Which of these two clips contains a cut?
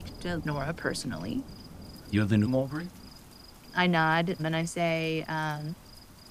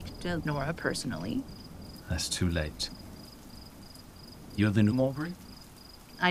first; 2 cuts; at 2.0 s, 4.4 s

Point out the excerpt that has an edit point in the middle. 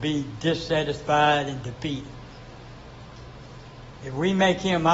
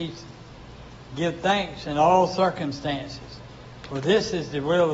first; 1 cut; at 4.0 s

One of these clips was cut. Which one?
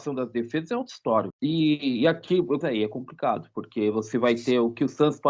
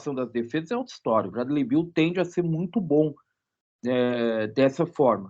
first; 2 cuts; at 1.3 s, 2.6 s

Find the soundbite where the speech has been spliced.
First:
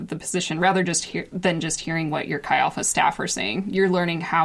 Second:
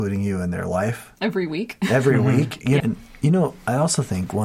second; 1 cut; at 2.8 s

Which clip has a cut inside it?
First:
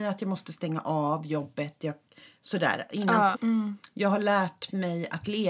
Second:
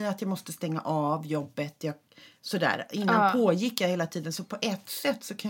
first; 1 cut; at 3.3 s

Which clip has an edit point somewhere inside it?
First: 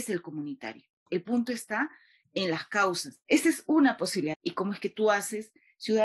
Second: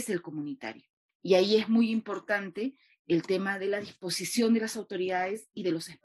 first; 3 cuts; at 1.1 s, 3.2 s, 4.3 s

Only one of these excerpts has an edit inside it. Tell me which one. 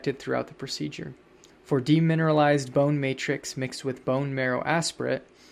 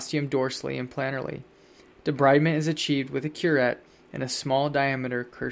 first; 1 cut; at 1.5 s

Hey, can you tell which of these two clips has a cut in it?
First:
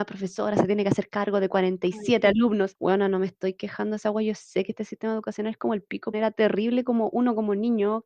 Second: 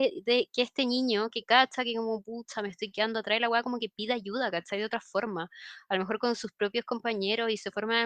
first; 1 cut; at 6.1 s

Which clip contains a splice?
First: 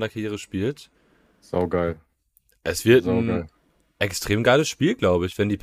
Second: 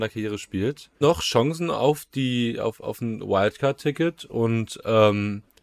second; 1 cut; at 1.0 s

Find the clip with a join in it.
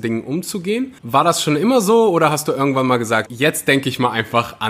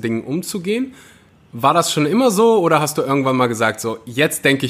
first; 2 cuts; at 1.0 s, 3.3 s

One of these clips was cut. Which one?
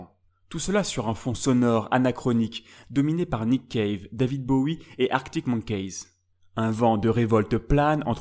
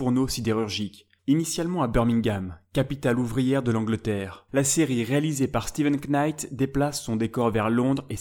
second; 2 cuts; at 1.2 s, 4.5 s

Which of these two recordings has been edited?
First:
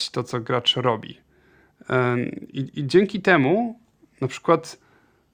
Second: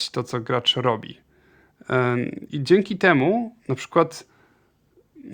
second; 2 cuts; at 2.5 s, 3.6 s

